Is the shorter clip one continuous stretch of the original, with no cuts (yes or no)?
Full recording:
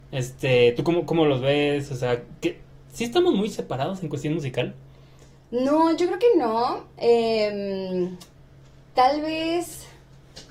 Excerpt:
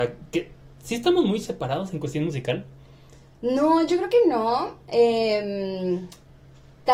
yes